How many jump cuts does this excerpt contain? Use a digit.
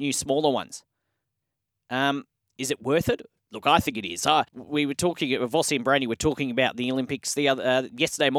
1